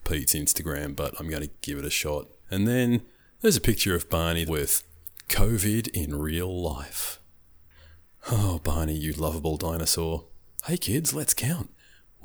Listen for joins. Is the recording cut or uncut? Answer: cut